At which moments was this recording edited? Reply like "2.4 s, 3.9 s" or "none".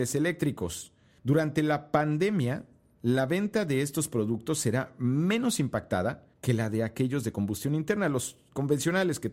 1.2 s, 6.3 s